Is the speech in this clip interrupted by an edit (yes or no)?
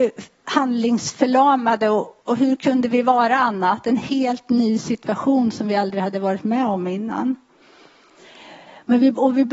yes